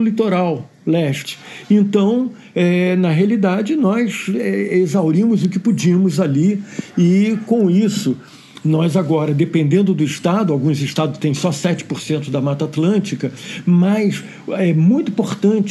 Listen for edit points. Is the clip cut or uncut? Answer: uncut